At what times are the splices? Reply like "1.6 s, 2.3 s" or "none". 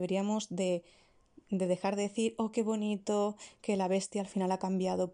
none